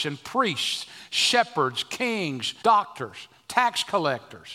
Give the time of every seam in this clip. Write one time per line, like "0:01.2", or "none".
0:02.6